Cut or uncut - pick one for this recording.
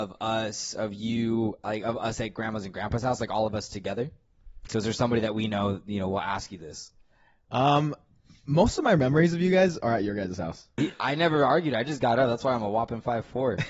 cut